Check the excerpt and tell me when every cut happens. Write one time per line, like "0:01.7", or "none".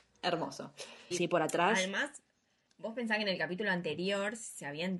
0:01.1

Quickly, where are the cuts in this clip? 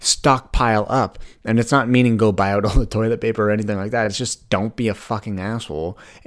none

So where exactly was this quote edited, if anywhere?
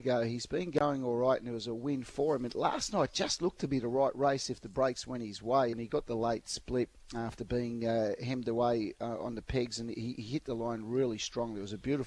0:05.7

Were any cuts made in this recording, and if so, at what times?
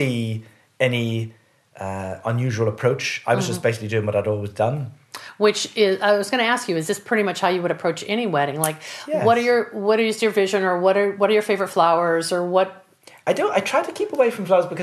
none

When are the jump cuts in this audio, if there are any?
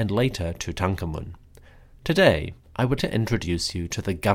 0:01.9
0:03.0

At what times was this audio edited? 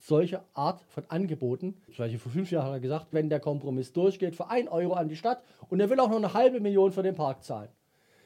0:01.9
0:03.1

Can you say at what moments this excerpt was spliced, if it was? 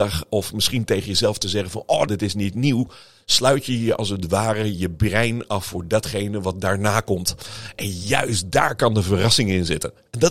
0:02.1

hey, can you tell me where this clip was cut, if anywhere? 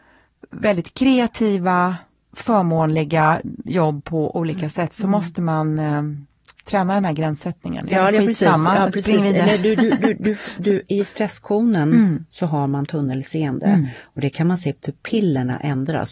0:07.9

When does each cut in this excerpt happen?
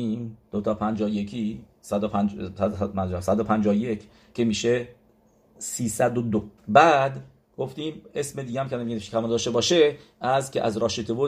0:06.6

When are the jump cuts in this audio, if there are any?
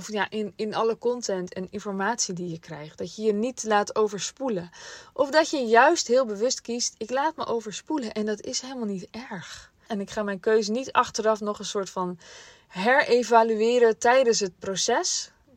0:09.9
0:14.6

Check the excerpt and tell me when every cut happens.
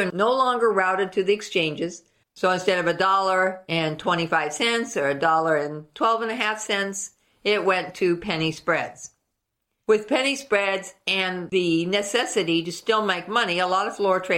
0:02.2

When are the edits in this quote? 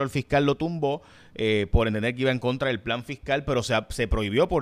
none

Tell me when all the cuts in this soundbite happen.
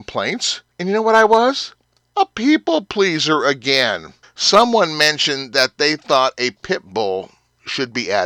0:04.2

